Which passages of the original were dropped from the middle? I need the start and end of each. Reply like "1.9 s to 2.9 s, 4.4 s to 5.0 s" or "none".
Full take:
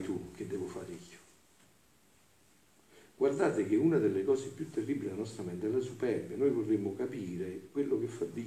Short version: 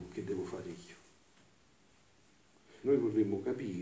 3.1 s to 6.4 s